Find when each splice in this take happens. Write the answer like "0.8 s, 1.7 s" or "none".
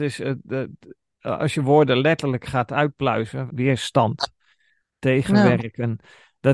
3.5 s